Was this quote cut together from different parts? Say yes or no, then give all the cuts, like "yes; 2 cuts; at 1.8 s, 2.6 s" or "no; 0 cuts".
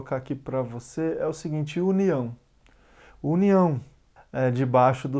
yes; 1 cut; at 4.2 s